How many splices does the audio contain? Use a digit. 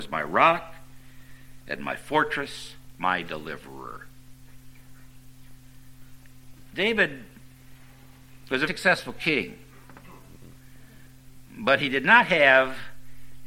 2